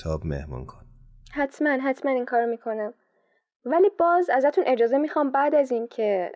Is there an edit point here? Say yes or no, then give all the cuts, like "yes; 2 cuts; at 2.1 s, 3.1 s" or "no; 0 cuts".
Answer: no; 0 cuts